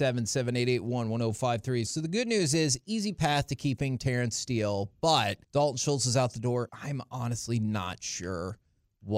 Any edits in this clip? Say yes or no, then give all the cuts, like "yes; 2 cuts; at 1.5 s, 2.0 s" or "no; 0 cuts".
yes; 3 cuts; at 1.9 s, 5.4 s, 6.7 s